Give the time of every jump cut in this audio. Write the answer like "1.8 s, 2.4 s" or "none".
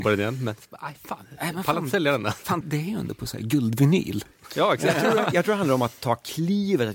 2.6 s